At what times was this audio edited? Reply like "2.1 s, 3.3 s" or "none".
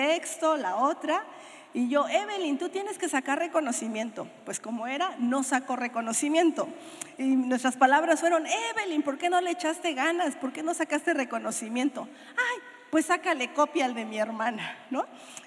none